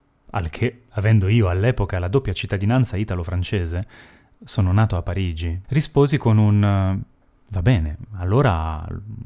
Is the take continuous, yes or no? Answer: no